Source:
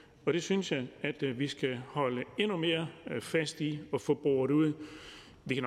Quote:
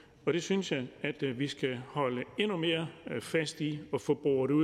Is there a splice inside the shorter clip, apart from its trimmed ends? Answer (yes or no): no